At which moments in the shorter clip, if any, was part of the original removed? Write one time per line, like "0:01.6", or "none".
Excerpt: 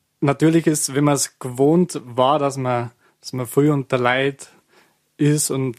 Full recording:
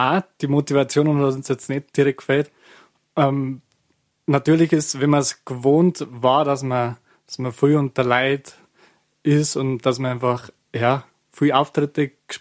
none